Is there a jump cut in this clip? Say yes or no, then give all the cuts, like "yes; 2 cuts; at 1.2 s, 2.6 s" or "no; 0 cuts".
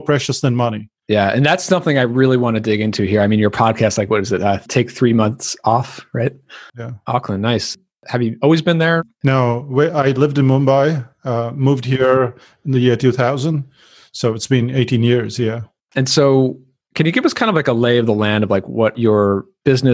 yes; 1 cut; at 6.7 s